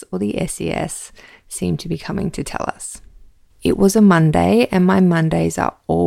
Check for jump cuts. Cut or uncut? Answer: cut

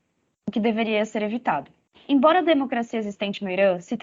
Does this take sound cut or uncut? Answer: cut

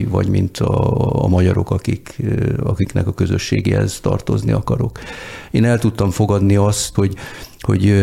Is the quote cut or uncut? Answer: cut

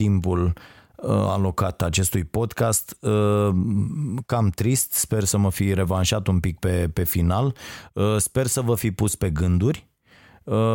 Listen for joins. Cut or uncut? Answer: uncut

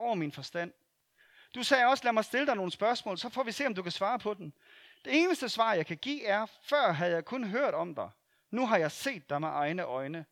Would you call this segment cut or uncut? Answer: uncut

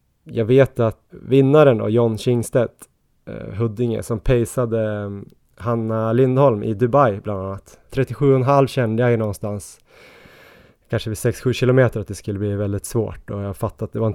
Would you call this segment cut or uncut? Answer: cut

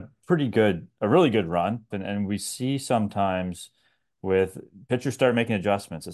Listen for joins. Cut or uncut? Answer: cut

